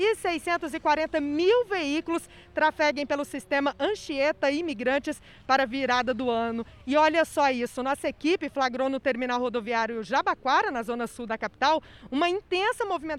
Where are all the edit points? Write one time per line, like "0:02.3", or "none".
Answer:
none